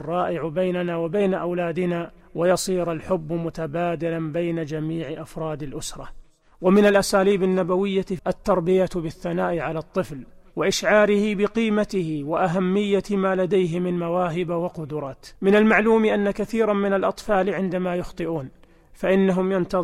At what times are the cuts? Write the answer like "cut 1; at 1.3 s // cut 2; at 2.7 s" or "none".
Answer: cut 1; at 8.2 s // cut 2; at 15.4 s